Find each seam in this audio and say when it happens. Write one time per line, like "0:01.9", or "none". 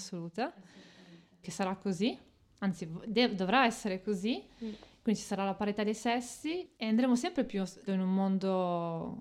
0:01.4
0:07.9